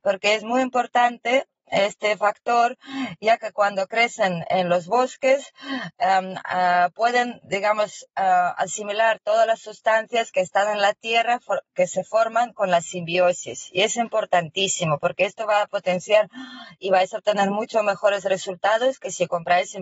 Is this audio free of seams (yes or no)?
yes